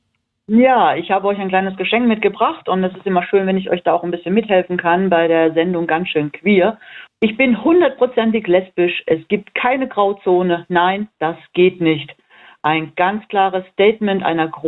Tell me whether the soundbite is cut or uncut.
cut